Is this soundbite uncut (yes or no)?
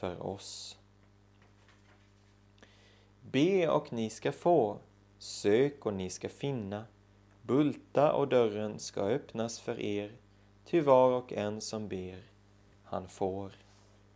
yes